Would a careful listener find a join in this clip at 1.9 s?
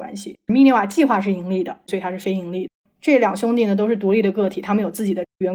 yes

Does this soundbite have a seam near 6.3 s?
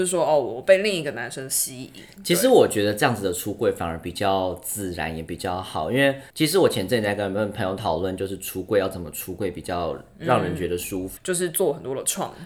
yes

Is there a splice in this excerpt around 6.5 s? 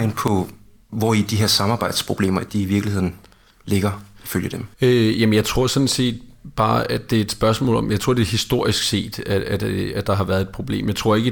no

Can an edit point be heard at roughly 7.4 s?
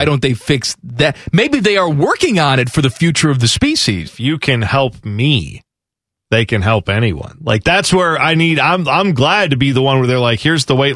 no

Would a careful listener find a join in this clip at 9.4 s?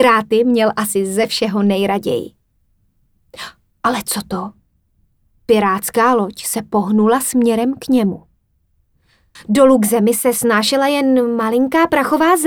yes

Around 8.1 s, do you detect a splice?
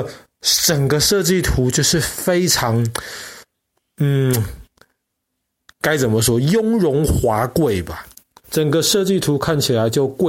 no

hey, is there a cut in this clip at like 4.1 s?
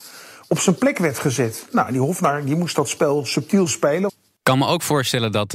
yes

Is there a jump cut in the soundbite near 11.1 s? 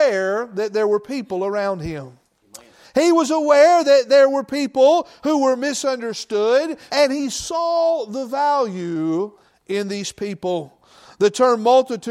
no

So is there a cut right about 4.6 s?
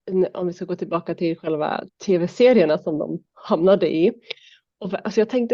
no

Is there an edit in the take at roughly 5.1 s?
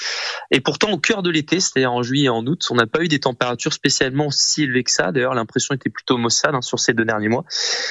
no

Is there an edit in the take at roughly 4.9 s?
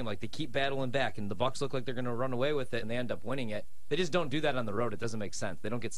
no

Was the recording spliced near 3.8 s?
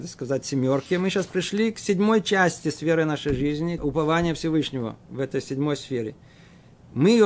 yes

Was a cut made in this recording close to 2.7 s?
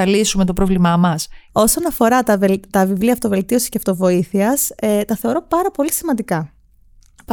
no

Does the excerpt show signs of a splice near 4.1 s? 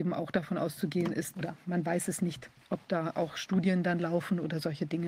no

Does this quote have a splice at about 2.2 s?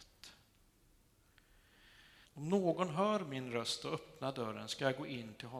yes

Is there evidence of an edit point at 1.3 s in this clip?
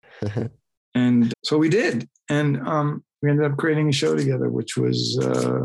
yes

